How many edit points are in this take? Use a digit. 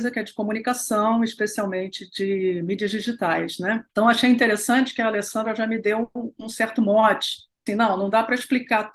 2